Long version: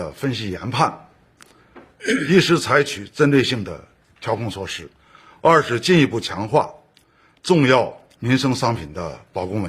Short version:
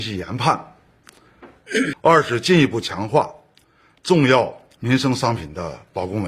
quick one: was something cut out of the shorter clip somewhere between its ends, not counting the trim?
yes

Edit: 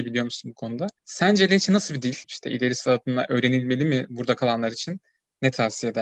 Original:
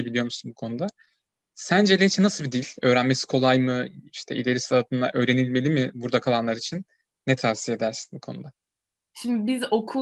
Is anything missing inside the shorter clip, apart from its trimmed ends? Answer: yes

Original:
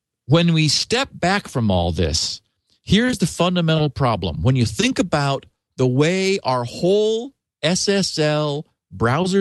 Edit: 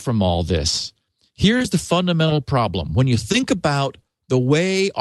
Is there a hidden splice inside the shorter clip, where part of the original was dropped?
no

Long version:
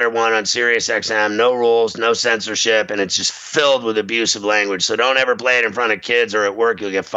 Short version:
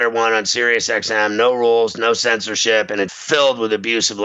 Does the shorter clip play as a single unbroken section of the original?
no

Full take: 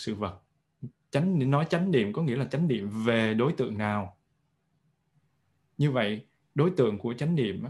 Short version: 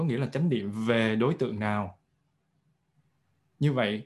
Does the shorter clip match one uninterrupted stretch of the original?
yes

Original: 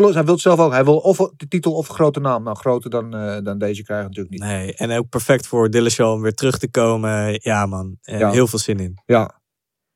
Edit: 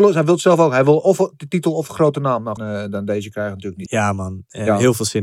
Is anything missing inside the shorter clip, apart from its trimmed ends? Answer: yes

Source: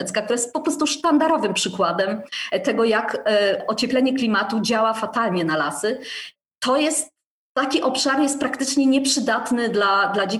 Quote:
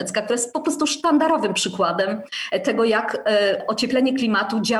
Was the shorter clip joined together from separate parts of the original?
no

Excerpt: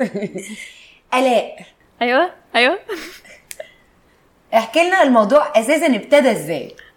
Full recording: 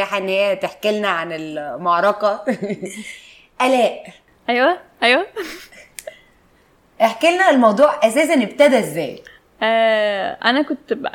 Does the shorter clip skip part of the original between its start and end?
no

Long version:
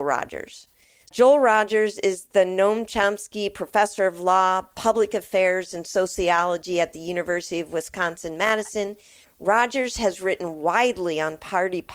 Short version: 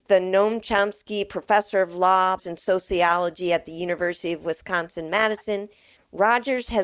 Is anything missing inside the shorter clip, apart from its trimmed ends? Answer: yes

